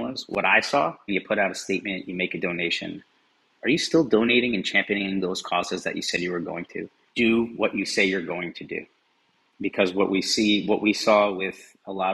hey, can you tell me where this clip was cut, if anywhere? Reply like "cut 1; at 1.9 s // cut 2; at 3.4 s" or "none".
cut 1; at 1.1 s // cut 2; at 3.6 s // cut 3; at 7.1 s